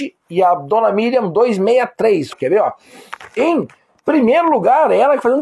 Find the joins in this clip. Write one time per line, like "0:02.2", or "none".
0:02.3